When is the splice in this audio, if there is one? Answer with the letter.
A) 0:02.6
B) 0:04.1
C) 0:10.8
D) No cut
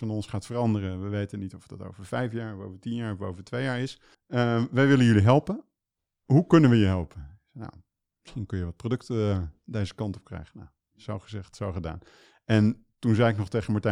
B